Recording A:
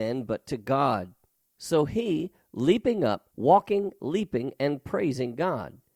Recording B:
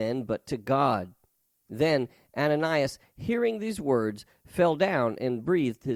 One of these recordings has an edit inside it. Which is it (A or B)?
A